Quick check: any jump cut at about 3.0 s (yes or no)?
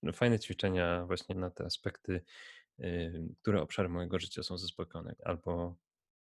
no